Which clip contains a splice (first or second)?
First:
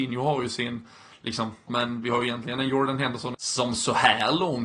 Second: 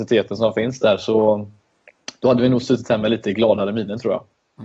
first